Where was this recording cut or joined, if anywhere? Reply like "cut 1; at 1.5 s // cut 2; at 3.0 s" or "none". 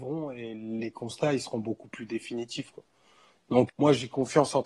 cut 1; at 3.7 s